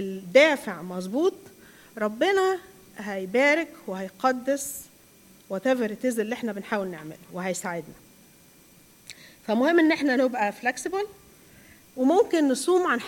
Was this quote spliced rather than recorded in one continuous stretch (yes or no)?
no